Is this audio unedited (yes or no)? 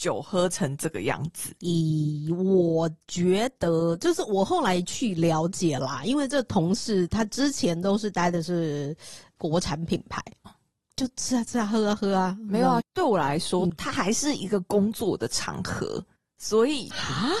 no